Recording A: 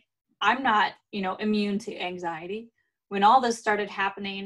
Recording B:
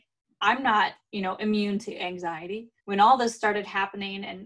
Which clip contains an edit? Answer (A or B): B